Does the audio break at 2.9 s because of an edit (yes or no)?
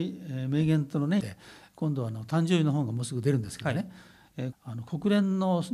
no